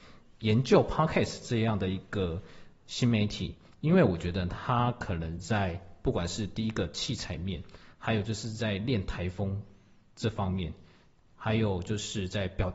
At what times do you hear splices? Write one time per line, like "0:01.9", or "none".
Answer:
none